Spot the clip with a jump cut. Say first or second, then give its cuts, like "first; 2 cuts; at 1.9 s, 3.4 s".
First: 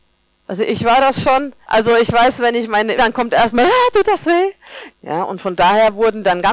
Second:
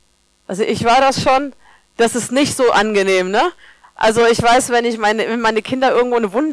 first; 3 cuts; at 1.6 s, 3.0 s, 4.9 s